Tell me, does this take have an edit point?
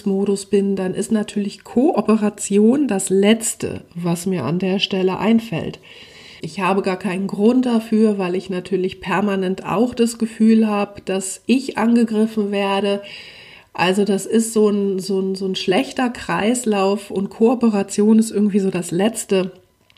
yes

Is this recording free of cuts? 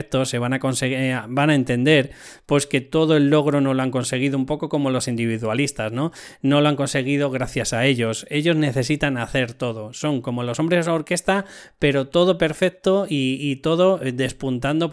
yes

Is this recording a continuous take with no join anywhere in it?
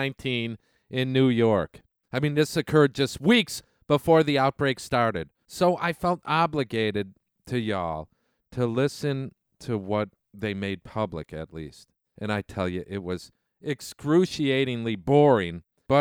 no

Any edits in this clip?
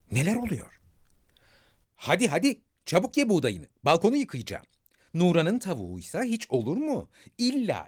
yes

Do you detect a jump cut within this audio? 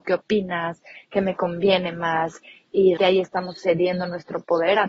yes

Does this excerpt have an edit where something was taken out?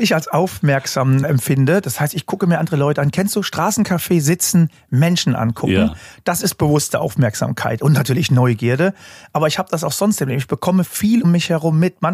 yes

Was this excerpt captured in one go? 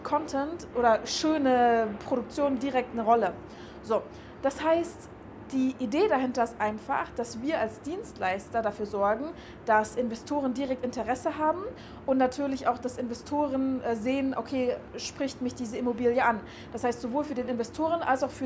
yes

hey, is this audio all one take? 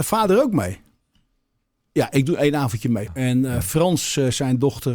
no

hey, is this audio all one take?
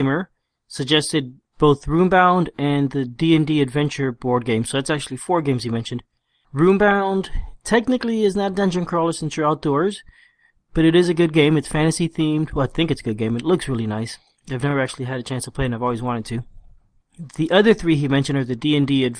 yes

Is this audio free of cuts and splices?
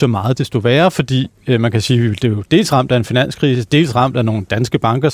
yes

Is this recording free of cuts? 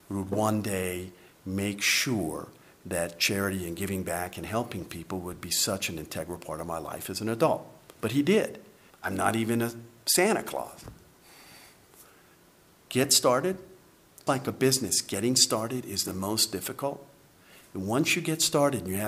no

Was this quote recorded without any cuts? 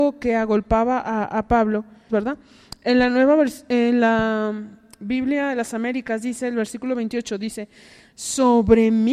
no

